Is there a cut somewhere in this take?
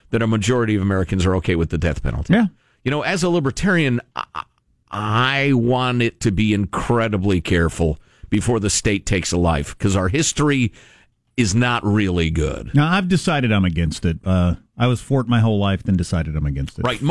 no; 0 cuts

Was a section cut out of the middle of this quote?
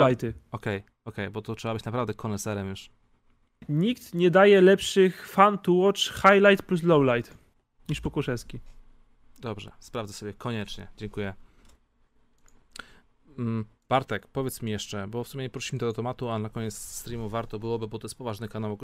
no; 0 cuts

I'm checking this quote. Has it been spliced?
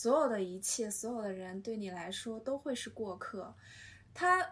no; 0 cuts

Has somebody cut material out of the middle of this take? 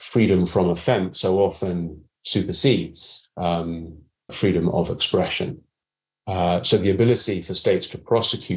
yes; 1 cut; at 4.3 s

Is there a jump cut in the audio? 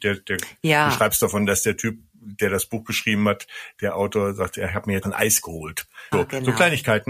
yes; 2 cuts; at 5.0 s, 6.1 s

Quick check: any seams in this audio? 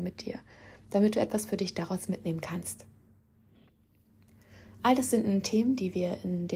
no; 0 cuts

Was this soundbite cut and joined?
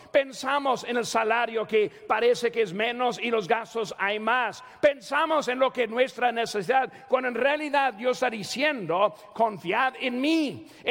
no; 0 cuts

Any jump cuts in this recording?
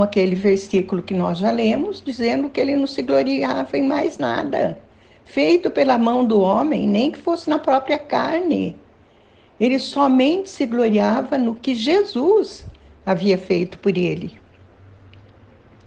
no; 0 cuts

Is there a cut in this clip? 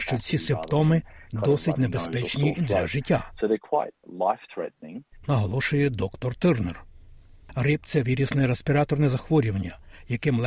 no; 0 cuts

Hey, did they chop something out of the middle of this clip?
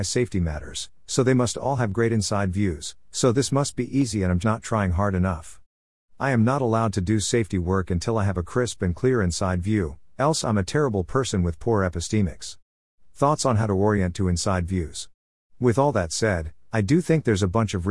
yes; 2 cuts; at 4.4 s, 6.0 s

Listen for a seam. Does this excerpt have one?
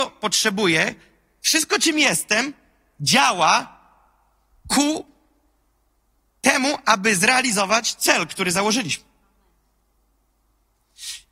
no; 0 cuts

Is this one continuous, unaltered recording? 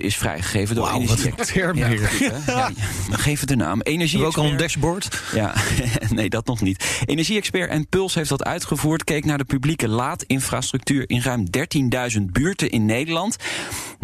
yes; 0 cuts

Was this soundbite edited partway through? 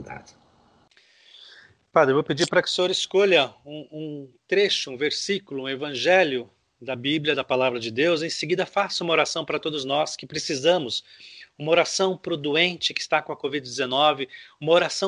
no; 0 cuts

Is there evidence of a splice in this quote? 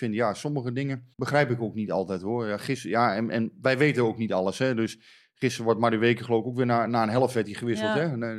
yes; 1 cut; at 1.1 s

